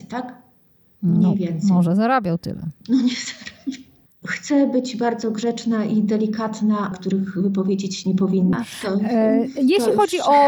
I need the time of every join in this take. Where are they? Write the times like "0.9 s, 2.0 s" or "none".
2.8 s, 6.9 s, 8.5 s